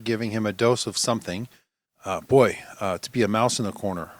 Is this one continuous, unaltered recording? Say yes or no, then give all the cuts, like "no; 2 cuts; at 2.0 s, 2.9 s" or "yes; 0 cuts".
no; 1 cut; at 1.8 s